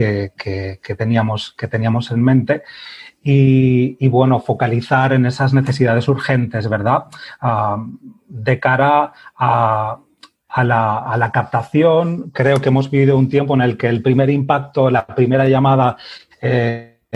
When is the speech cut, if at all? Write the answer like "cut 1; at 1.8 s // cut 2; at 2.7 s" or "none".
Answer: none

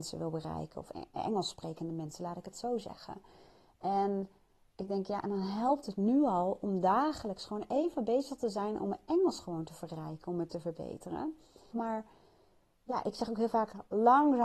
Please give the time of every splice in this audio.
cut 1; at 11.7 s

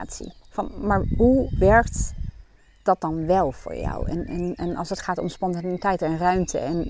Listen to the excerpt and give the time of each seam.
cut 1; at 4.3 s

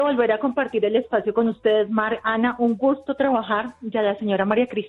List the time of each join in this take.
none

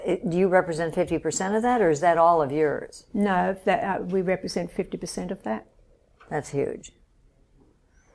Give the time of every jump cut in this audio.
none

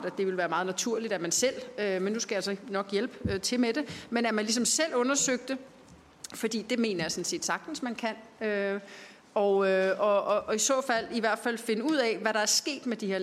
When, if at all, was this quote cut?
none

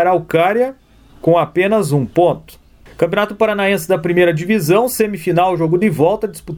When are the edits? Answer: none

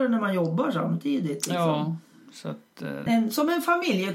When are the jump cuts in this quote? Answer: cut 1; at 3.1 s

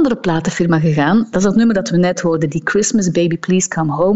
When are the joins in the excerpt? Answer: cut 1; at 1.3 s

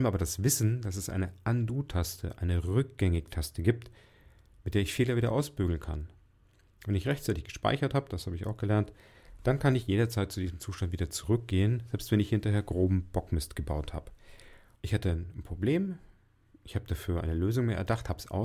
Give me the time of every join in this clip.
cut 1; at 14.7 s

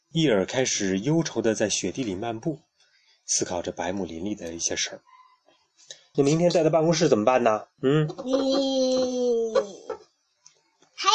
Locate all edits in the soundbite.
cut 1; at 6.1 s

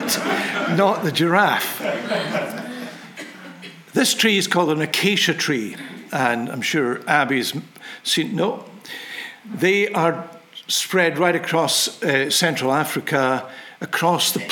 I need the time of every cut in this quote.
none

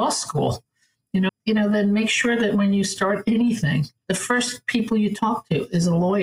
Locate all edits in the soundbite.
cut 1; at 1.3 s // cut 2; at 4.0 s

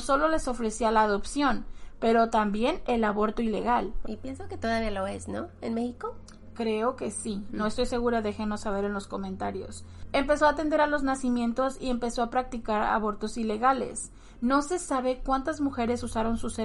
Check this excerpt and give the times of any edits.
cut 1; at 4.0 s // cut 2; at 14.4 s

